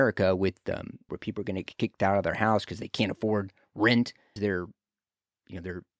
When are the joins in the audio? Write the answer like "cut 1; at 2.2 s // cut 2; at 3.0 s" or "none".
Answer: cut 1; at 1.1 s // cut 2; at 4.4 s

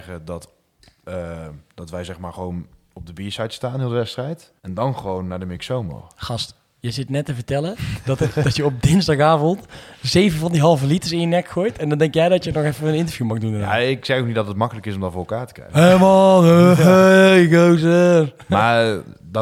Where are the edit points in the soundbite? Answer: cut 1; at 4.6 s

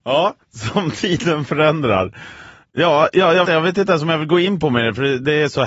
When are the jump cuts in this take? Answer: cut 1; at 3.5 s

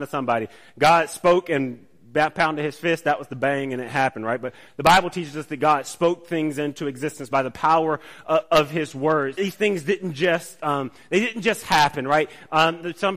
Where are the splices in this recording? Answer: cut 1; at 9.4 s

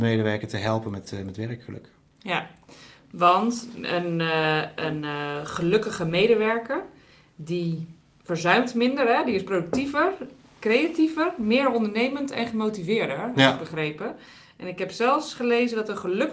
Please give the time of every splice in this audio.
none

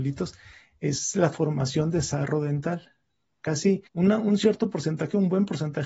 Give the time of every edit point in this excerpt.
cut 1; at 3.9 s

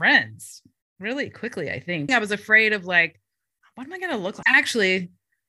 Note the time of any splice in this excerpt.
cut 1; at 2.1 s // cut 2; at 4.4 s

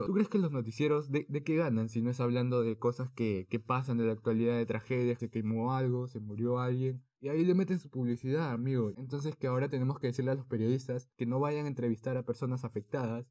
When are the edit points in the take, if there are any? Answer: cut 1; at 5.2 s // cut 2; at 8.9 s

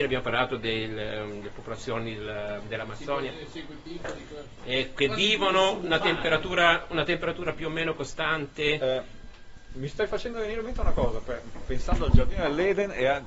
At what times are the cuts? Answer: none

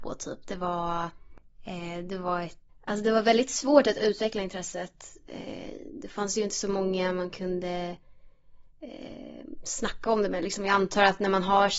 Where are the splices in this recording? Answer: cut 1; at 2.7 s

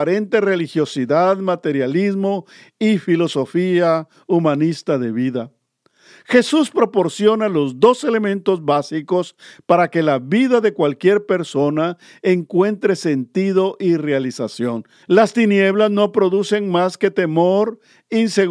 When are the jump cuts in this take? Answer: cut 1; at 15.0 s

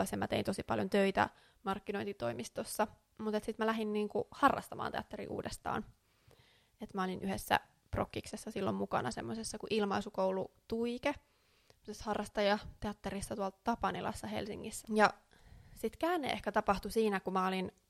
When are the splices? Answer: cut 1; at 14.8 s

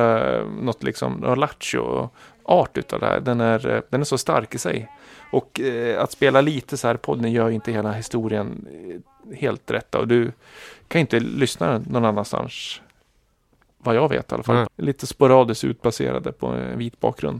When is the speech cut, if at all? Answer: cut 1; at 14.6 s

